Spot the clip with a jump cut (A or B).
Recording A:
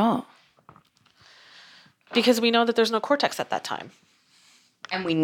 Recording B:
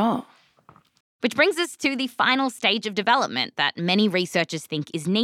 B